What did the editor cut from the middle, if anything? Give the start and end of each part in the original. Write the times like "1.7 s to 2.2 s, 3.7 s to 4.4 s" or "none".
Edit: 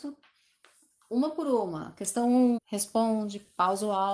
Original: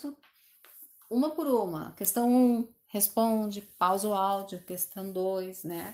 2.6 s to 2.8 s